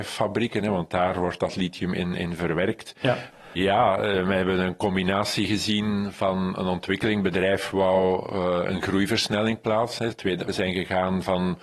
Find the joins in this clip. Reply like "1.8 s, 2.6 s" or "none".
3.3 s, 10.5 s